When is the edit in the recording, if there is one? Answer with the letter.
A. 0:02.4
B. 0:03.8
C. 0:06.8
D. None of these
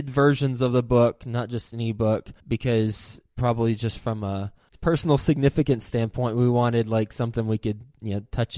A